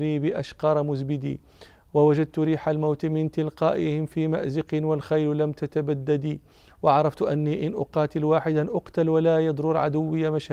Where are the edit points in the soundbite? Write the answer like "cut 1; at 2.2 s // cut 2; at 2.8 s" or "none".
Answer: none

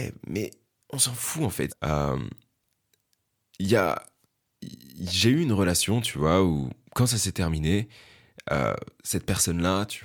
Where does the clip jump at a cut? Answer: cut 1; at 1.7 s

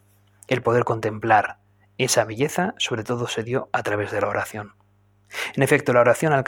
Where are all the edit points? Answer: none

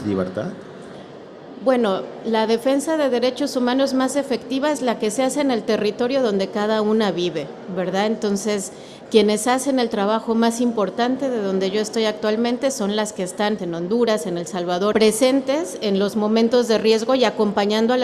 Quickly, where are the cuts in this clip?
cut 1; at 13.6 s // cut 2; at 14.9 s

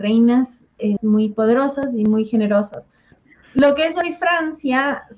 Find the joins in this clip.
cut 1; at 1.0 s // cut 2; at 3.1 s

